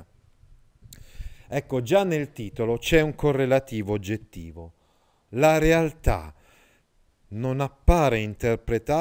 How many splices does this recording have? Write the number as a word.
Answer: one